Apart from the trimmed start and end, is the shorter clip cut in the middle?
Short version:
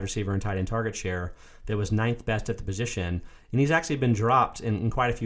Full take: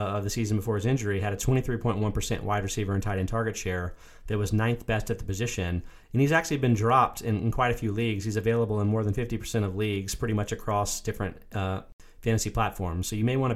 no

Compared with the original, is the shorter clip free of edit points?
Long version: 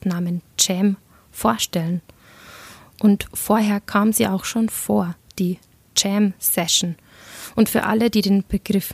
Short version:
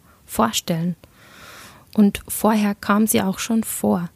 yes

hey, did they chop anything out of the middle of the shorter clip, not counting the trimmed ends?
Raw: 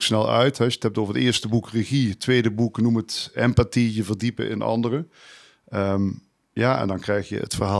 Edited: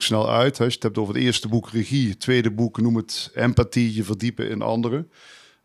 no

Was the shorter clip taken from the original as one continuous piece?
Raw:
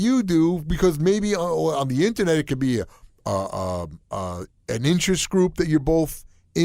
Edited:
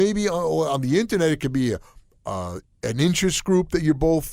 no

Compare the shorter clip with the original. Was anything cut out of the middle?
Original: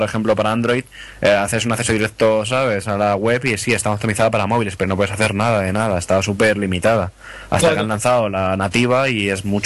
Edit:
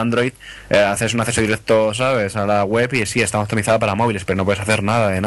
no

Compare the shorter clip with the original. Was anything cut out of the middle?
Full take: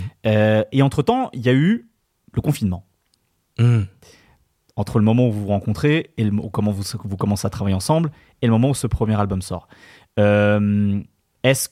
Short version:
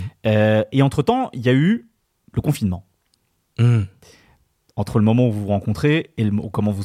no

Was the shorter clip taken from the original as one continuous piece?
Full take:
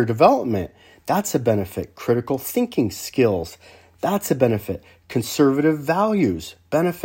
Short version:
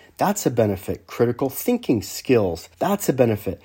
no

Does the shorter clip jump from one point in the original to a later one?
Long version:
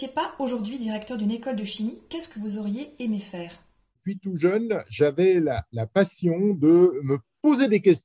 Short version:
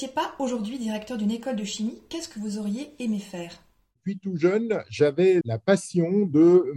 yes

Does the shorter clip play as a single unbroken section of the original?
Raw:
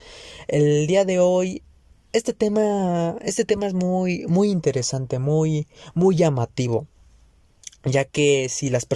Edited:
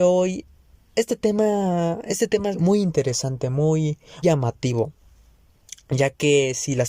no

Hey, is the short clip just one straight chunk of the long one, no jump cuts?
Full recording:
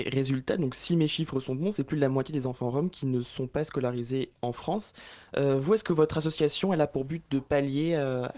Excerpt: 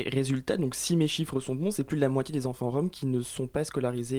yes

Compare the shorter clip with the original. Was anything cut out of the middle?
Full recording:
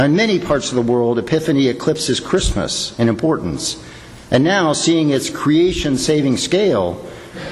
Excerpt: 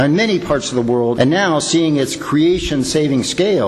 yes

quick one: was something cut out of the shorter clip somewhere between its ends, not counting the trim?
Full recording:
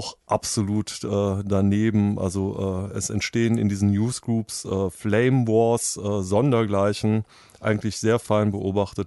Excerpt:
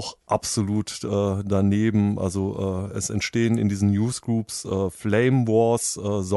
no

